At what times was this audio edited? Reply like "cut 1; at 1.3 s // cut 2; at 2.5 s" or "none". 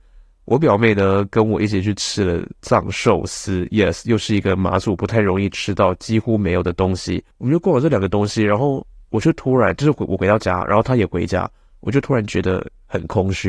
cut 1; at 7.3 s